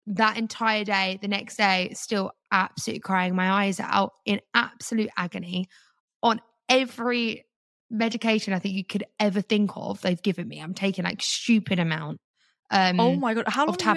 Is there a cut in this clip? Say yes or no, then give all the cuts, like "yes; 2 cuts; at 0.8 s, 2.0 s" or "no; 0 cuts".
no; 0 cuts